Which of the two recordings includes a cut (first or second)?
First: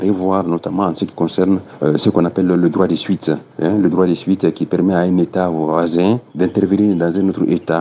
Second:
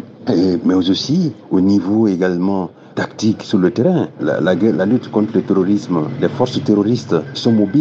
second